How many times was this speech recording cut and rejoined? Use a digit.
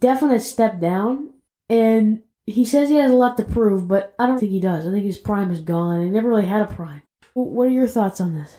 2